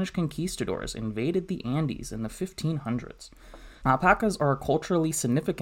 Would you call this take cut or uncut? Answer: cut